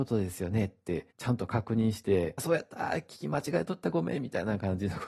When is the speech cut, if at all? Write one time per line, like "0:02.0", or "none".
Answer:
0:01.1
0:02.4